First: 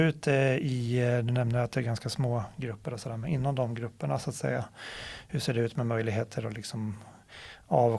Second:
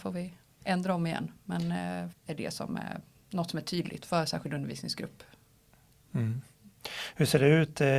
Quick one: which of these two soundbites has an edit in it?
second; 1 cut; at 2.1 s

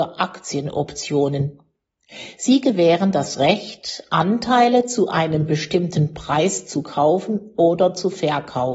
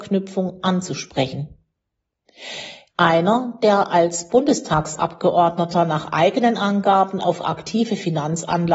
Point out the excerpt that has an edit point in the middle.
second; 1 cut; at 2.9 s

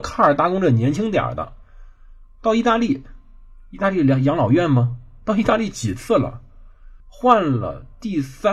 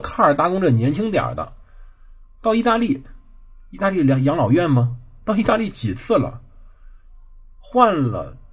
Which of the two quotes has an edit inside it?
first; 1 cut; at 7.0 s

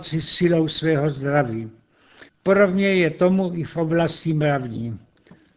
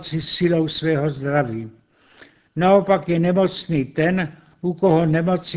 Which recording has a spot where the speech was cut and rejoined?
first; 1 cut; at 2.3 s

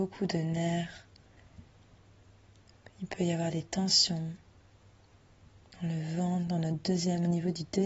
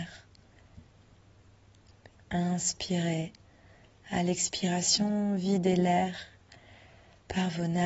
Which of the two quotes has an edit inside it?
second; 2 cuts; at 2.1 s, 4.0 s

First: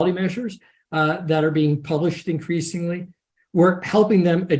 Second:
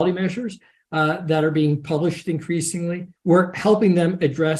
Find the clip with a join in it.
second; 1 cut; at 3.2 s

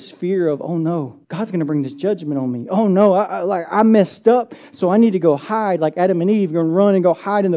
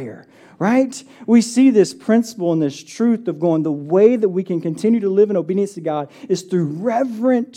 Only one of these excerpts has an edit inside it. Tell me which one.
first; 1 cut; at 1.2 s

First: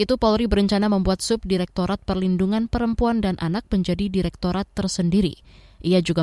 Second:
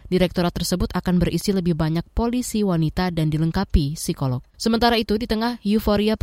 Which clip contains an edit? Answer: second; 1 cut; at 4.5 s

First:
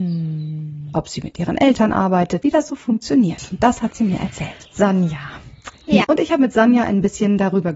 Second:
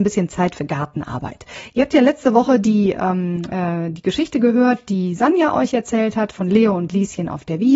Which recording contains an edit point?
first; 3 cuts; at 0.9 s, 2.4 s, 6.0 s

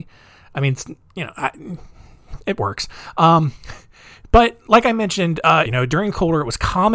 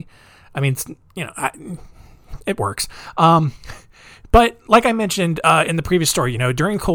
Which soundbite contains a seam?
first; 1 cut; at 5.7 s

